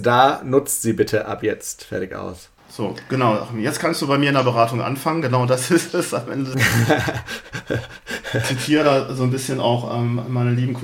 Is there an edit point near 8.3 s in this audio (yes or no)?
no